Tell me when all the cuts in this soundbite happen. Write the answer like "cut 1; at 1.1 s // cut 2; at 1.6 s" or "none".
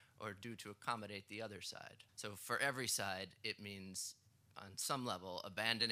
cut 1; at 2.1 s